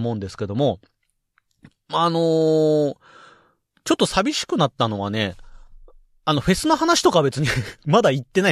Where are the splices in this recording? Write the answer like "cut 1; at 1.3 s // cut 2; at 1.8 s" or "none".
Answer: none